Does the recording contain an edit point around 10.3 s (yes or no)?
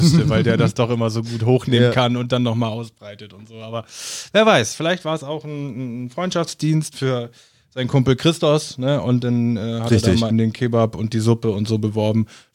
yes